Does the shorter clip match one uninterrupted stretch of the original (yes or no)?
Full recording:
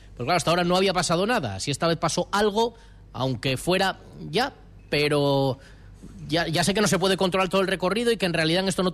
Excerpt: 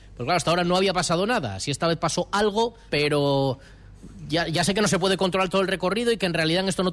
no